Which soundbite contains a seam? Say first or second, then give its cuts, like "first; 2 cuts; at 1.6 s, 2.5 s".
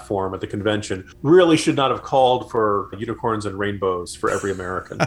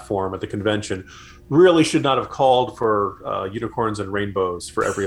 first; 2 cuts; at 1.1 s, 2.9 s